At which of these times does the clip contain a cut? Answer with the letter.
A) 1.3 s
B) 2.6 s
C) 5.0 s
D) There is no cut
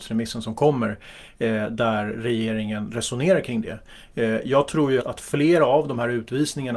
C